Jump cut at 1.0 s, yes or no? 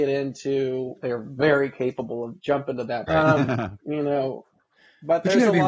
yes